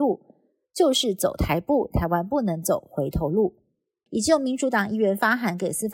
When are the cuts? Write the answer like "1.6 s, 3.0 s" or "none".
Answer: 4.1 s

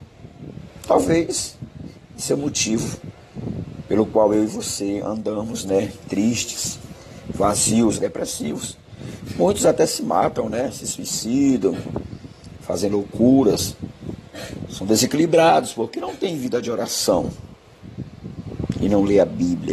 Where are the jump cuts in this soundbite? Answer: 7.9 s

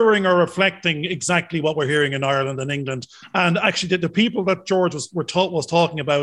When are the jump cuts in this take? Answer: none

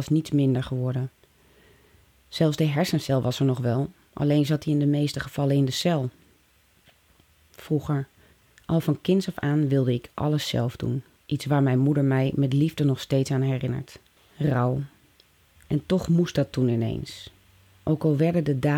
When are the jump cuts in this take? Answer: 14.2 s

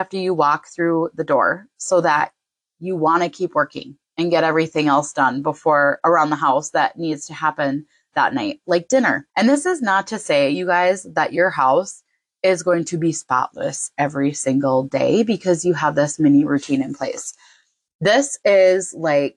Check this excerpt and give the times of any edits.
9.3 s

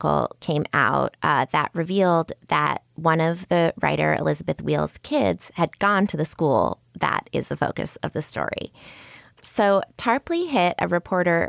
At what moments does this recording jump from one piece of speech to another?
9.3 s

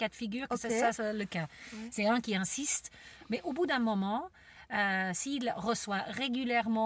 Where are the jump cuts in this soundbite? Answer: none

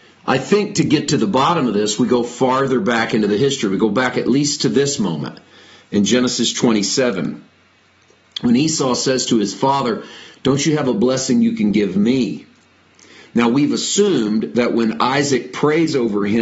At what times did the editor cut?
none

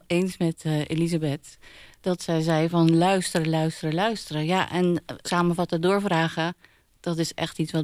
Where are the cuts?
5.2 s

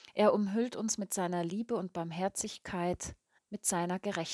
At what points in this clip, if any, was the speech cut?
3.4 s

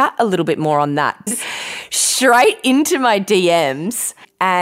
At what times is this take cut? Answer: 1.3 s

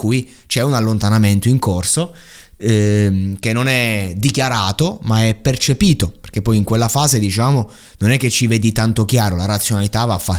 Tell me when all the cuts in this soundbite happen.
none

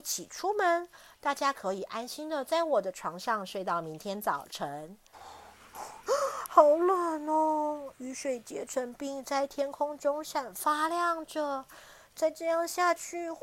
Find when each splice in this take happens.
5.1 s, 10.2 s

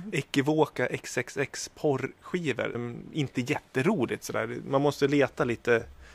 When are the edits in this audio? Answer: 2.7 s

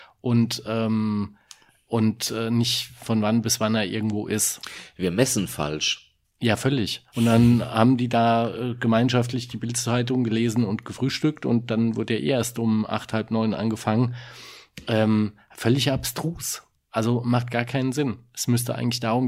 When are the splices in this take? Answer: 7.1 s

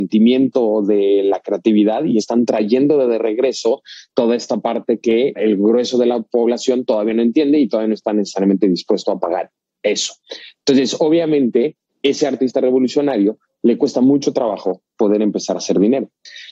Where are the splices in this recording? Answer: 2.2 s

